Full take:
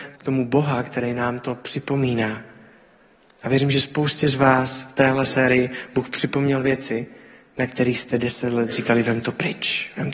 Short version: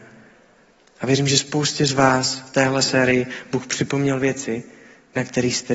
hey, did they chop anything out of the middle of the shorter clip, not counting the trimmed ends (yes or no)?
no